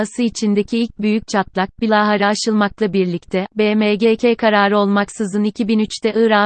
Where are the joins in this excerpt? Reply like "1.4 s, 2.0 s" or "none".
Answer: 3.5 s